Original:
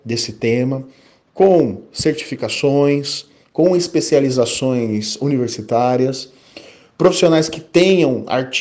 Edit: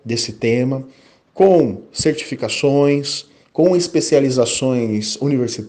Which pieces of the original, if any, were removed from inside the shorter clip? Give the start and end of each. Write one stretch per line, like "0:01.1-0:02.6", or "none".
none